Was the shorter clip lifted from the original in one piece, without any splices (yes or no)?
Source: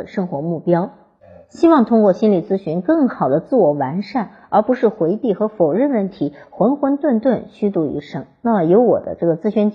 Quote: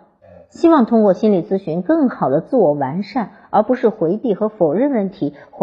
yes